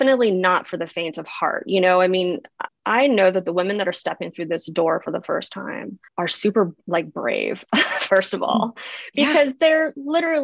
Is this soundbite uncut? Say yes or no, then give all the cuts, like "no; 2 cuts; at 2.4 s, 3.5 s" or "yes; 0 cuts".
no; 2 cuts; at 2.7 s, 6.1 s